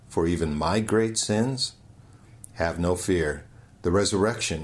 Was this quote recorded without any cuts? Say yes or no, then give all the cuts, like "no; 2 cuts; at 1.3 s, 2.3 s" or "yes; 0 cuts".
yes; 0 cuts